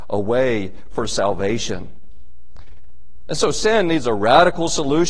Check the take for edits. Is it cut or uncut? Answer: uncut